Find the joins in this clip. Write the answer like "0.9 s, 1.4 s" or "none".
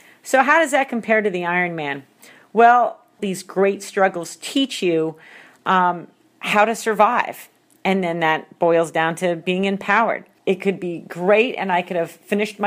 3.2 s, 10.4 s